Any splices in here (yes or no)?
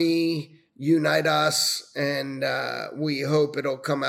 no